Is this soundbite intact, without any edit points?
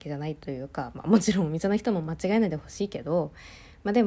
yes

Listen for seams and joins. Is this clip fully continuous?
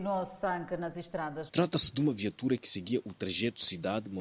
no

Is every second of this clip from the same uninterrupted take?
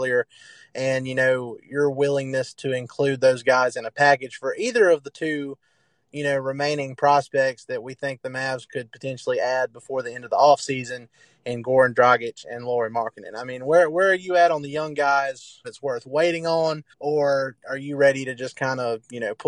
no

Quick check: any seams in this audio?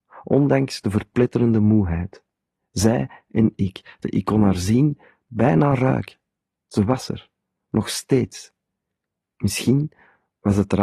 yes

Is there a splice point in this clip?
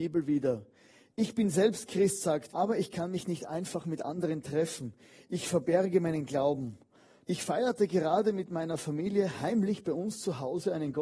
yes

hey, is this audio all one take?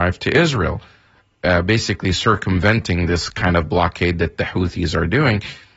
yes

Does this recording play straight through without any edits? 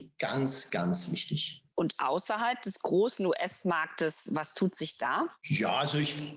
yes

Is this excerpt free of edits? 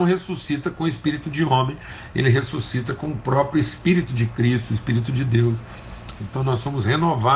no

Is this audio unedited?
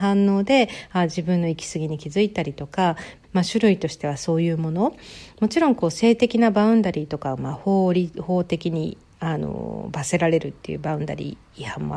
no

